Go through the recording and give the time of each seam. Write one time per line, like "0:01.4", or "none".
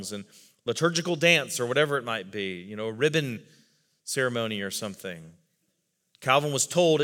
0:06.1

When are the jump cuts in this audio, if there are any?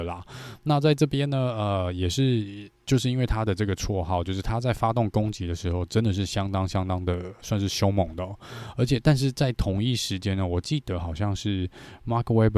none

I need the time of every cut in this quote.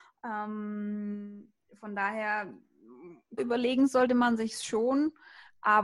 0:03.4

